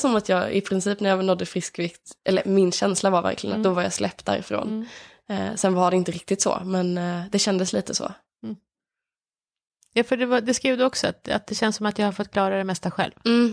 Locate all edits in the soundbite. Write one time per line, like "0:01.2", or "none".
none

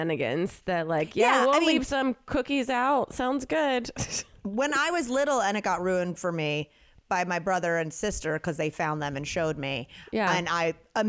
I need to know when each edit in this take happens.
none

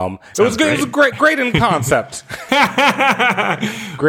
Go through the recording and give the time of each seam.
0:02.5

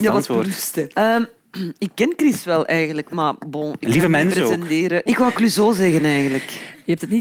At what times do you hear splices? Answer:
0:00.9
0:05.1

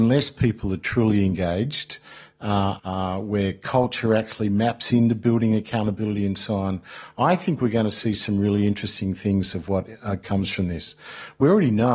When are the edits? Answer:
0:02.8

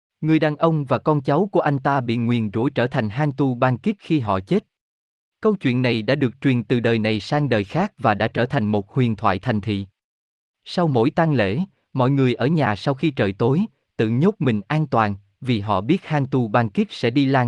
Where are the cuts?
none

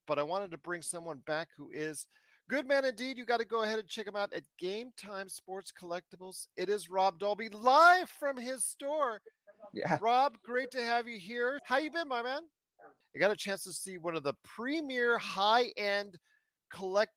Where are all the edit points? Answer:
0:11.6
0:13.0

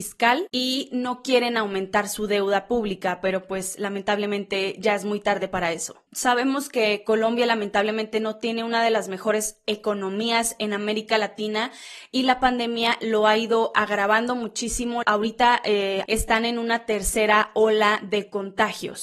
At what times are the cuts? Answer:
0:06.1
0:15.0
0:16.1

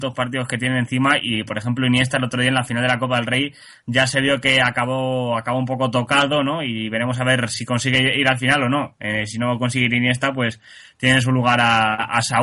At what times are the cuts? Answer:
none

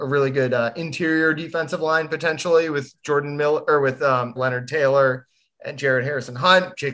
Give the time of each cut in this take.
0:04.4

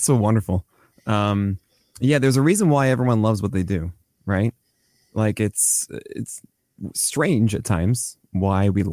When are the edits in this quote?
none

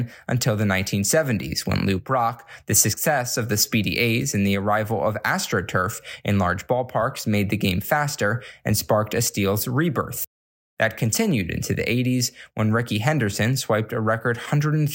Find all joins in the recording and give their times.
none

